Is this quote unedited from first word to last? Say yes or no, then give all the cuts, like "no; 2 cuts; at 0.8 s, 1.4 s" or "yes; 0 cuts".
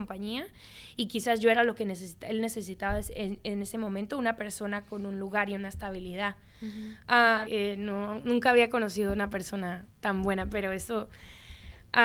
no; 1 cut; at 7.4 s